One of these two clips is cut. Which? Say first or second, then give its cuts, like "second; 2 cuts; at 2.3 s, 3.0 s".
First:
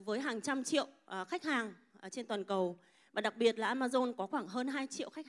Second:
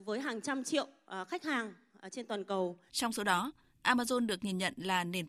second; 1 cut; at 2.9 s